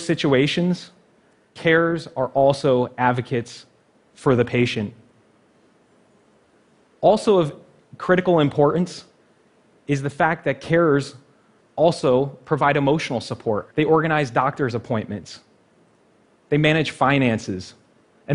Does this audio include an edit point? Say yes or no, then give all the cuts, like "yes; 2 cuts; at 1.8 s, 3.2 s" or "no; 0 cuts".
yes; 1 cut; at 13.7 s